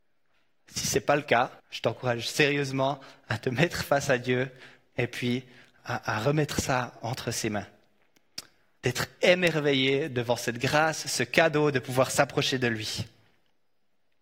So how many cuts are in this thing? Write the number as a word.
two